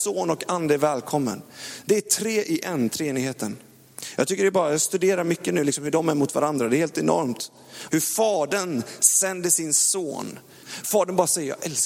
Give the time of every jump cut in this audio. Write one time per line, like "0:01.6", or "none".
0:07.9
0:10.6